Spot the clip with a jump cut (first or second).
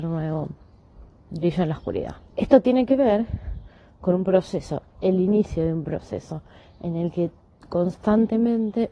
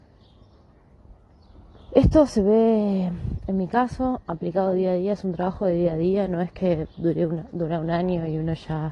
first